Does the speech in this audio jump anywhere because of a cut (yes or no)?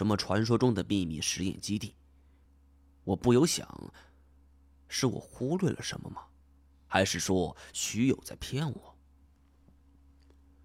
no